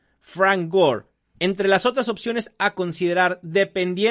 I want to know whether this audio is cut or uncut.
cut